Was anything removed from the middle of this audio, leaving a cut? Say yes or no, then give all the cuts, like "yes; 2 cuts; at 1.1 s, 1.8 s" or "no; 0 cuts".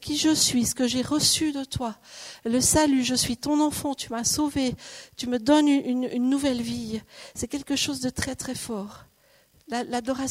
no; 0 cuts